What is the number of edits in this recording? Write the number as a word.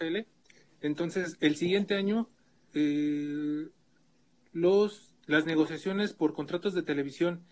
one